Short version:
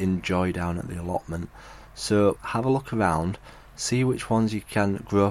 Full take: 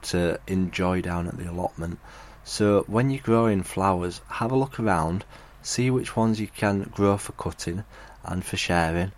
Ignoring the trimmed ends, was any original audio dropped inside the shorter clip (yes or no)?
yes